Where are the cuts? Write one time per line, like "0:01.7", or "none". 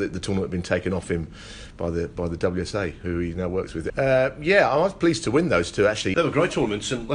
0:03.9
0:06.1